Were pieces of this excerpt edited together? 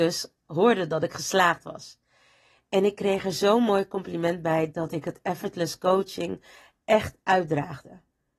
no; 0 cuts

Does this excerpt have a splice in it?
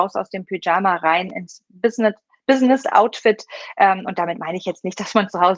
no; 0 cuts

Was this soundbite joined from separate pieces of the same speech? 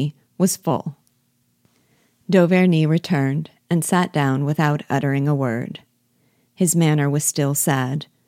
no; 0 cuts

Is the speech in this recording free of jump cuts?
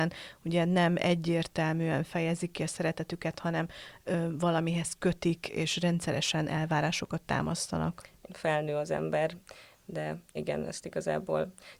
no; 1 cut; at 8.3 s

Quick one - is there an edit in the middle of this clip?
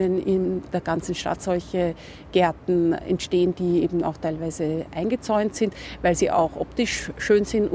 no; 0 cuts

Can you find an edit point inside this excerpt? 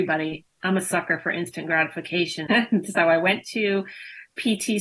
yes; 1 cut; at 2.5 s

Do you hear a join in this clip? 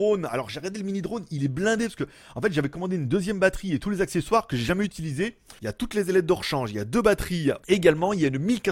yes; 2 cuts; at 5.6 s, 7.6 s

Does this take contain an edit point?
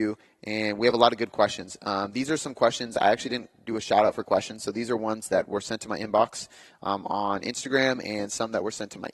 no; 0 cuts

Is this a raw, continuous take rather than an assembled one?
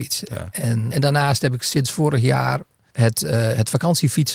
no; 1 cut; at 0.9 s

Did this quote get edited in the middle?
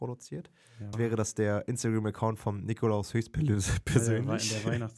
yes; 1 cut; at 0.9 s

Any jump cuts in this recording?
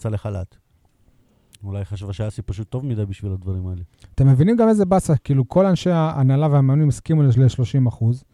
yes; 1 cut; at 1.5 s

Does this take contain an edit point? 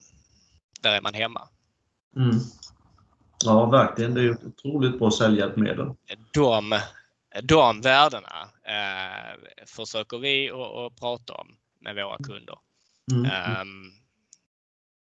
no; 0 cuts

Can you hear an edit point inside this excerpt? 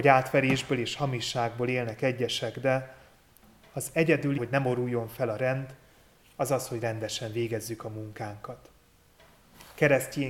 yes; 1 cut; at 4.4 s

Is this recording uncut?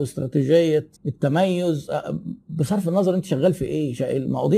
no; 1 cut; at 1.0 s

